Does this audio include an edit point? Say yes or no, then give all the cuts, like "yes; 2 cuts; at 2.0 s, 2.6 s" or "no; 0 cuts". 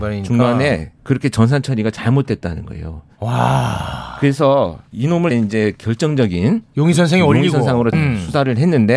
yes; 2 cuts; at 5.3 s, 7.9 s